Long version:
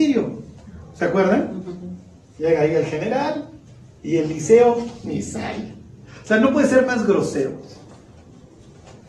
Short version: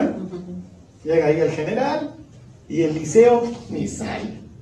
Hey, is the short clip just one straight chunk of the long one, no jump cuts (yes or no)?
yes